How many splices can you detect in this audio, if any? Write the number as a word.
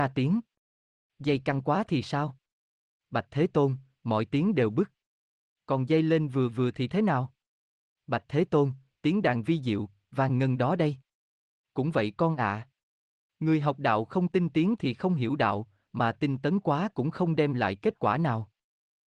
zero